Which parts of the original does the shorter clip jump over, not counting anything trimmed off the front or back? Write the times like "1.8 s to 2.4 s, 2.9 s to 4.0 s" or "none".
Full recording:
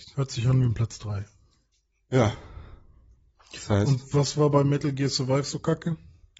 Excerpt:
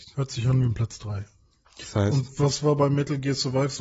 1.7 s to 3.4 s